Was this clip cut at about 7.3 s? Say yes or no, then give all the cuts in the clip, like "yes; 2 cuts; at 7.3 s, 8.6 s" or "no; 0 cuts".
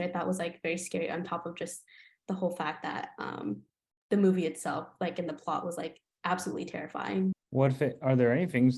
yes; 1 cut; at 7.3 s